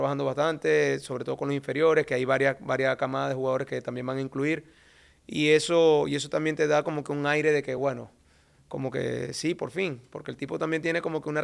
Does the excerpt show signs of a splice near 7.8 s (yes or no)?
no